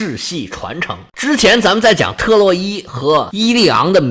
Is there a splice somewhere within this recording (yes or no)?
yes